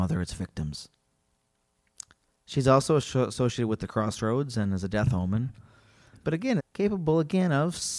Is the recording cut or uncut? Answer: cut